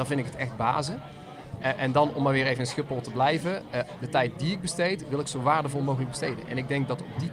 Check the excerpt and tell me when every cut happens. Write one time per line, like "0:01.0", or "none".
0:04.0